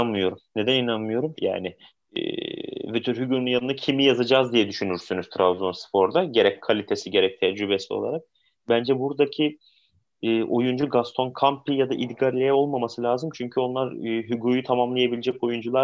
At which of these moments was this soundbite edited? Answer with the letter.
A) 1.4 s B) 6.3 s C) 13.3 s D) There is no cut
A